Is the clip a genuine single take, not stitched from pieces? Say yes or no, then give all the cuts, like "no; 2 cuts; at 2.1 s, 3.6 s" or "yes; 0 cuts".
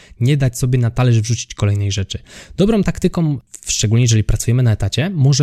yes; 0 cuts